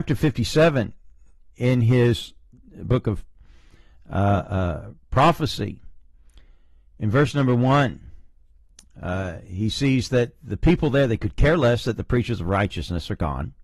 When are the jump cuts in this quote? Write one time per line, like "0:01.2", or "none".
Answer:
none